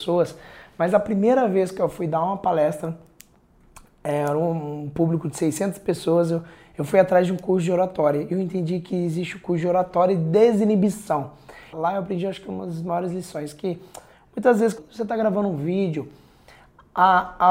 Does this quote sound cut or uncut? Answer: cut